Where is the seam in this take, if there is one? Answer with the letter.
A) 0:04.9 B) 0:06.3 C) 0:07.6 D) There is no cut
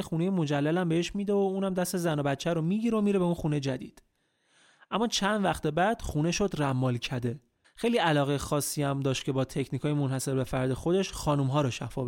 C